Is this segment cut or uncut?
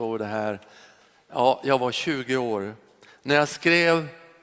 uncut